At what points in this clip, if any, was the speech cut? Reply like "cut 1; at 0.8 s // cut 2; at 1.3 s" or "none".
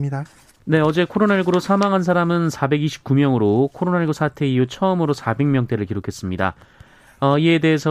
none